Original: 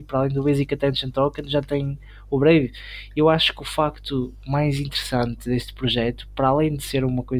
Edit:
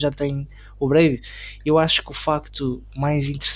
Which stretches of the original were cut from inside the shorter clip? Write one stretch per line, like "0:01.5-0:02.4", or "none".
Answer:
none

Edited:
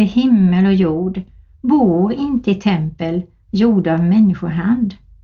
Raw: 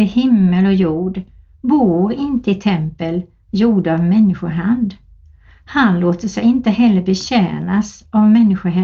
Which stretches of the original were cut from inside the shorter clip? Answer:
none

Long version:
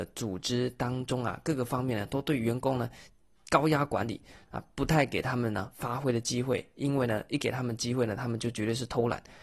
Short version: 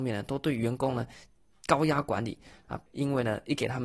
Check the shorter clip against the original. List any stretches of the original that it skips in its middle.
0:04.7-0:06.7

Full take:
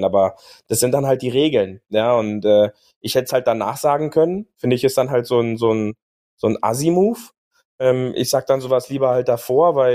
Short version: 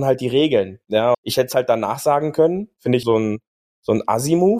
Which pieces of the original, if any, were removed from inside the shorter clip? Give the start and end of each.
0:02.2-0:02.9
0:04.8-0:05.6

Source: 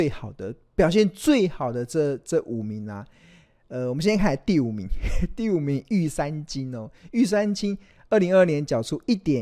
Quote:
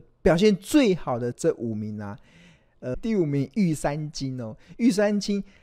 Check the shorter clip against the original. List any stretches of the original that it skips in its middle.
0:01.8-0:02.2
0:03.8-0:05.3

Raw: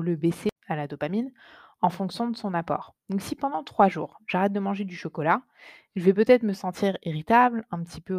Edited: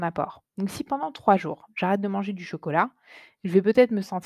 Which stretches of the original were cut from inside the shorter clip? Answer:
none

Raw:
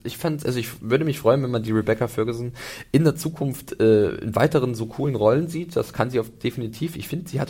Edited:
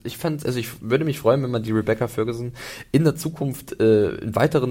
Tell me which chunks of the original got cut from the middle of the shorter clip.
none

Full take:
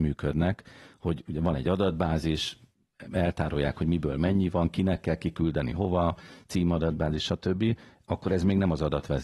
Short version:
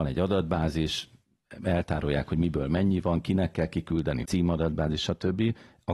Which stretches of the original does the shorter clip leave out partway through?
0:05.7-0:06.5

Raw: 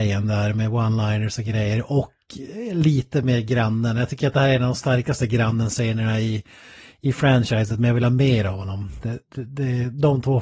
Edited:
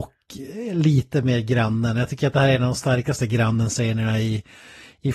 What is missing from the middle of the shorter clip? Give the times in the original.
none

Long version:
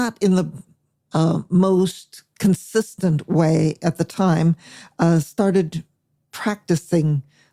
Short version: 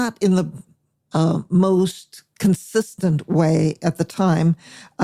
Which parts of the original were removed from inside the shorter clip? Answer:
none

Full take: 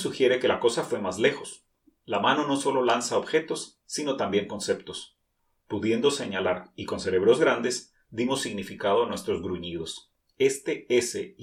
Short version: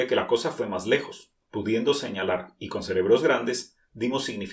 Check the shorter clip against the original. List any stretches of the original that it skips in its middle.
0:01.8-0:05.6

